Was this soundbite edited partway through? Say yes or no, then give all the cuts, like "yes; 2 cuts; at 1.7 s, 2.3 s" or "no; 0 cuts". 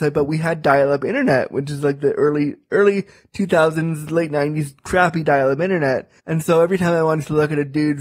yes; 1 cut; at 6.2 s